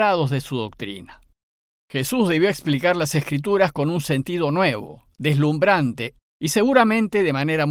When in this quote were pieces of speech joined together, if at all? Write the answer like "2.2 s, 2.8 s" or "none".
6.2 s